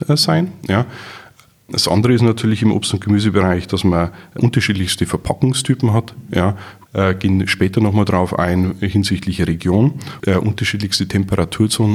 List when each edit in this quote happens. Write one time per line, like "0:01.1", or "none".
0:10.2